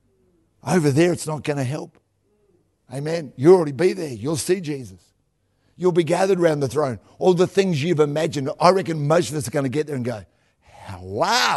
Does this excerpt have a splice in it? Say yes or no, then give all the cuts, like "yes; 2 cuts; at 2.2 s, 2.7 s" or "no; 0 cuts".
no; 0 cuts